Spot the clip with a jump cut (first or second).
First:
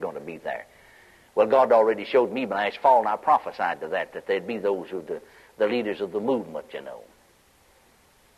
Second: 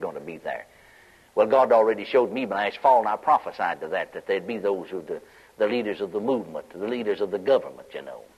first